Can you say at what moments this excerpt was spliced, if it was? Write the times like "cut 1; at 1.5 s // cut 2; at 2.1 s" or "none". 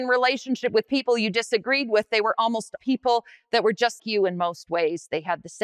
cut 1; at 2.8 s // cut 2; at 4.0 s

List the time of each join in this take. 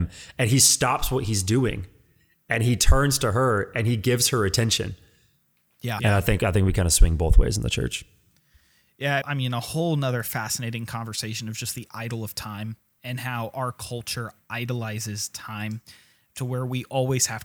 cut 1; at 6.0 s // cut 2; at 9.2 s

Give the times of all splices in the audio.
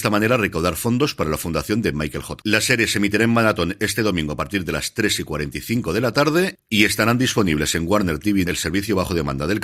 cut 1; at 2.4 s // cut 2; at 8.4 s

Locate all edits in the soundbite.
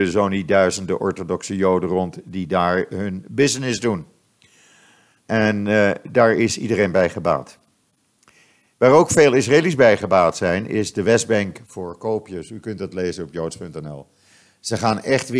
cut 1; at 5.2 s

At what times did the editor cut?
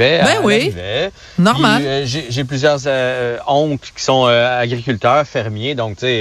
none

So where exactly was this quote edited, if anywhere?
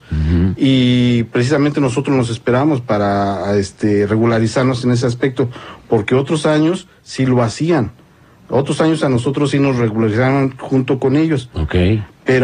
none

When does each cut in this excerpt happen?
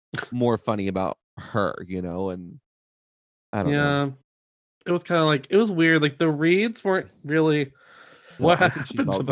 cut 1; at 8.4 s

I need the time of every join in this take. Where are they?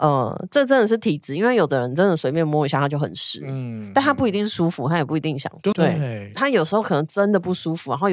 cut 1; at 5.7 s

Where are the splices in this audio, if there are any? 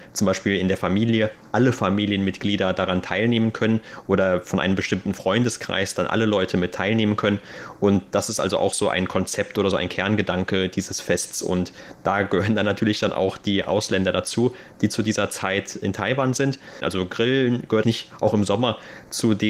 cut 1; at 16.8 s // cut 2; at 17.8 s

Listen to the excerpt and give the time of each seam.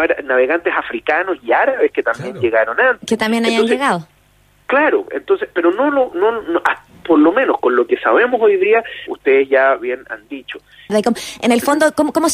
cut 1; at 9.1 s // cut 2; at 10.9 s

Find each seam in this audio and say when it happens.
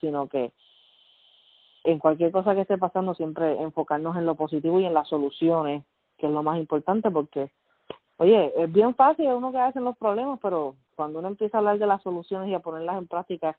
none

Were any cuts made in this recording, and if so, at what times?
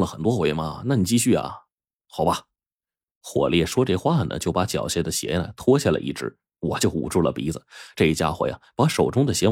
none

